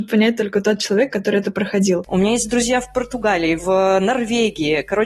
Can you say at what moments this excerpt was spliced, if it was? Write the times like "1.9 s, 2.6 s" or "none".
2.1 s, 3.6 s